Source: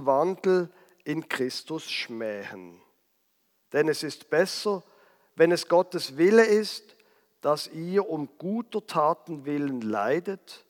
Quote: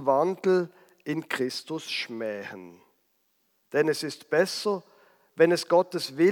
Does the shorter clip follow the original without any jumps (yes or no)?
yes